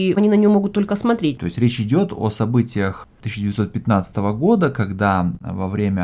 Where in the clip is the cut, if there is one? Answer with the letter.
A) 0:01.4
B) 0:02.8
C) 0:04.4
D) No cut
A